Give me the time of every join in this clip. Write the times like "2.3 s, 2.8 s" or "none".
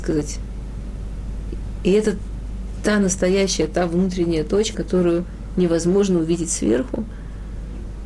4.7 s

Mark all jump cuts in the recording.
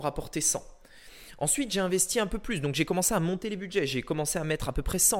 none

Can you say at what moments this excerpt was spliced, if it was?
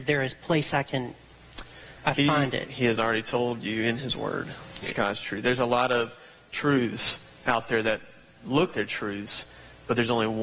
4.8 s, 8.7 s

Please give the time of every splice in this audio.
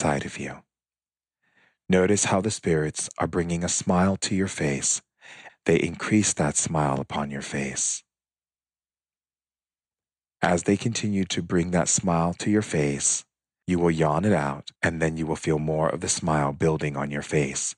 5.5 s, 13.6 s, 14.8 s

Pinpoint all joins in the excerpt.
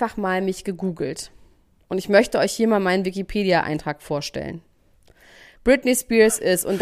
none

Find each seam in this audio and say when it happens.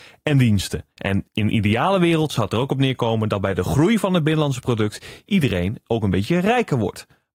0.9 s

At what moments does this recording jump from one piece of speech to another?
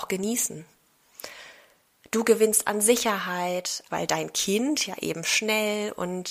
3.9 s

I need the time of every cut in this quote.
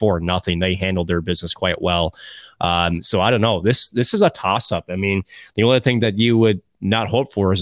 none

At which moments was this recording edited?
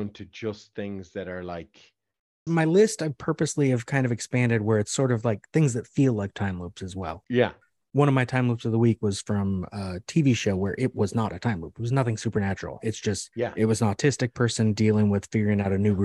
2.5 s

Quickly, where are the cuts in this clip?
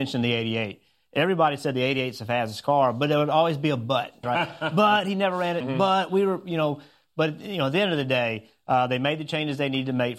4.2 s, 5.6 s

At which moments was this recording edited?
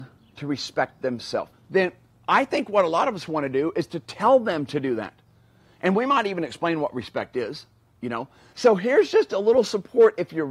1.5 s, 8.5 s

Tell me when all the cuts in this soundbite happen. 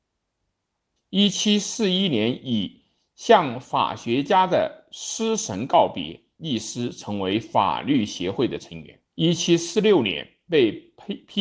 1.0 s, 9.1 s

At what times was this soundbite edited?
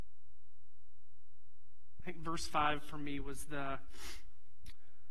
2.0 s

